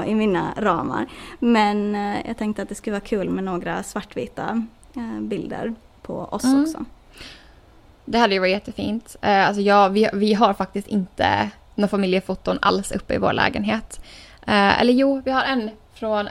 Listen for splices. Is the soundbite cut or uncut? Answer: uncut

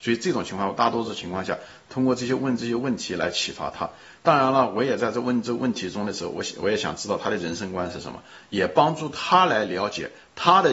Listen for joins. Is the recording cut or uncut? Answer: uncut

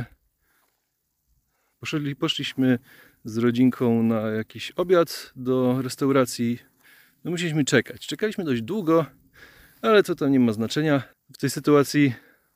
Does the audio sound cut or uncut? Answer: cut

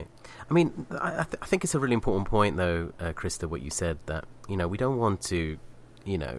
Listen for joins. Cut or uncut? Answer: uncut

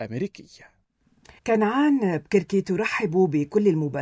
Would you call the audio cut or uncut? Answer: cut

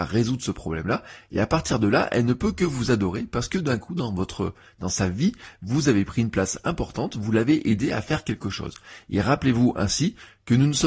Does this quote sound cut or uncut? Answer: uncut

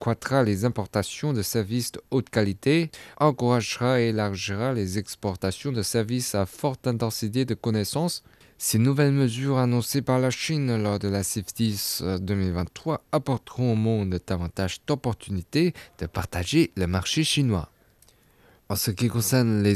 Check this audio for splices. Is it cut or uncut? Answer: uncut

